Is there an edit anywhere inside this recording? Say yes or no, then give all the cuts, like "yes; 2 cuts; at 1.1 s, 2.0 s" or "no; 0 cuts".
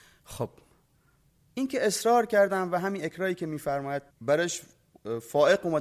yes; 1 cut; at 4.1 s